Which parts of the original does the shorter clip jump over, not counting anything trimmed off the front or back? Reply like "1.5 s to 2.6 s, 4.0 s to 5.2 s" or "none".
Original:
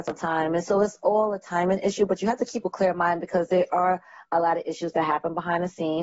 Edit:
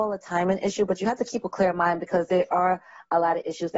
none

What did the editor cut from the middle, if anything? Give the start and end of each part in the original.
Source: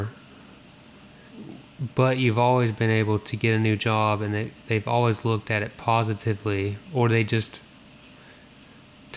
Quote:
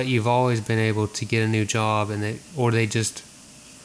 4.6 s to 6.9 s

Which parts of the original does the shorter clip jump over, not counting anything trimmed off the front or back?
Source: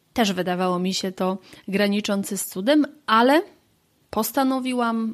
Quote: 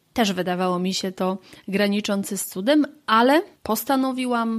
3.6 s to 4.0 s

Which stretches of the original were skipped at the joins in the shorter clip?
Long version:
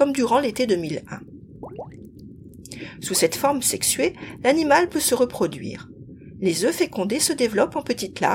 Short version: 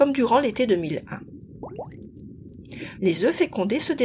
3.0 s to 6.4 s

